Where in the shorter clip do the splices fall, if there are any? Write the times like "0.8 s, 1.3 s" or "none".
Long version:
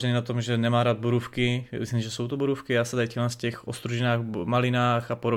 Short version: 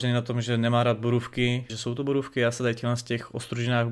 1.7 s